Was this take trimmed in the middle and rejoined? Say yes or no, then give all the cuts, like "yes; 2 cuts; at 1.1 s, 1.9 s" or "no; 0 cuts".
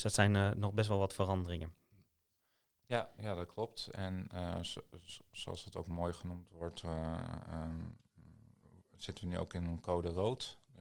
yes; 1 cut; at 3.2 s